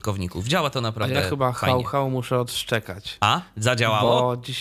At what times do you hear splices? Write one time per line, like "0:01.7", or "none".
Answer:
none